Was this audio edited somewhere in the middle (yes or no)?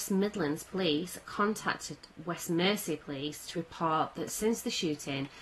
no